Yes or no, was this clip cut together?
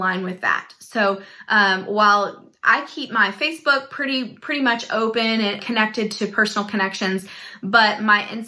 yes